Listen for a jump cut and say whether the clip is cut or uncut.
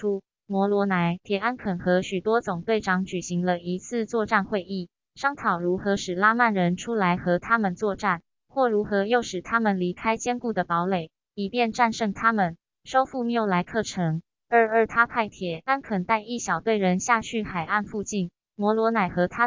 cut